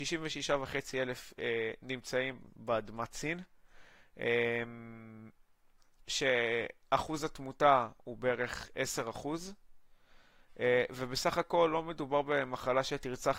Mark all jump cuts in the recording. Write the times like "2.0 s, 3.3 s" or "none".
none